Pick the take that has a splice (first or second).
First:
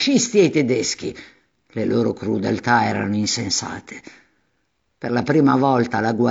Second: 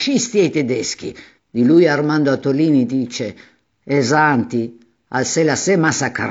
second